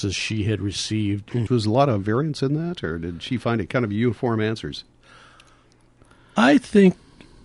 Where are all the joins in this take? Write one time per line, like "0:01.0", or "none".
0:01.5